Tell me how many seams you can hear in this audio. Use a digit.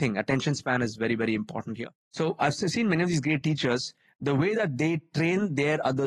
1